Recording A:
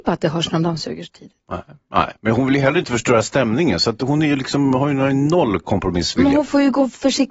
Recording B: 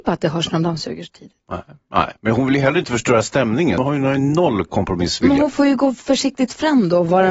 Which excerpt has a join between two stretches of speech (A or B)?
B